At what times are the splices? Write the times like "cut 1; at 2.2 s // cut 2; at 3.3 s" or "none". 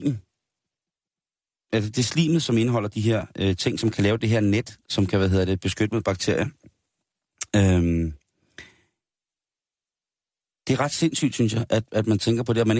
cut 1; at 4.8 s